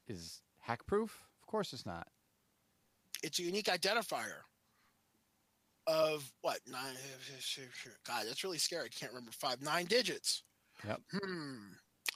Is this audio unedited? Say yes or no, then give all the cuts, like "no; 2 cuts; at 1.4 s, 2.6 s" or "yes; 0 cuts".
yes; 0 cuts